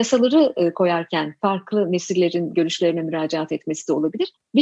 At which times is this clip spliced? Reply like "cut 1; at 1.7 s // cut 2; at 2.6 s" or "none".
none